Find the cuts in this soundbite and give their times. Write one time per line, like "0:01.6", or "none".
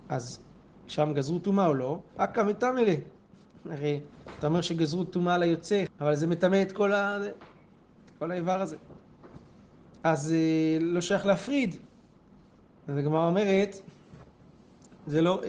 0:02.1
0:05.9